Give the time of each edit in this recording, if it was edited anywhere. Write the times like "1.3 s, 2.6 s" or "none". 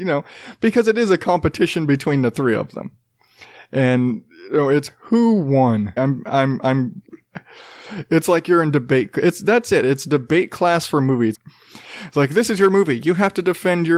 6.0 s, 7.0 s, 11.3 s